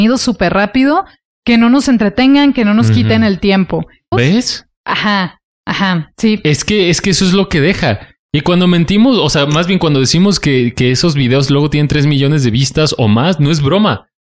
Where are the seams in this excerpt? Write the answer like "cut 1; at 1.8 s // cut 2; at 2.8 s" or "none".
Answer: cut 1; at 4.1 s